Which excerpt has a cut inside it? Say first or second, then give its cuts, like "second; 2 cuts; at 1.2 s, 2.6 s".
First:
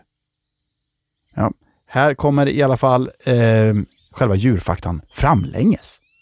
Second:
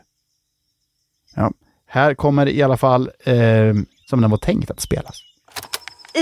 second; 1 cut; at 4.0 s